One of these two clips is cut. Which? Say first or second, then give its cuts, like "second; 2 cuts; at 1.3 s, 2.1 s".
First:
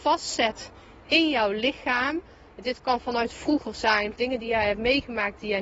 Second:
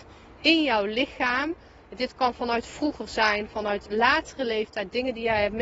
first; 1 cut; at 4.2 s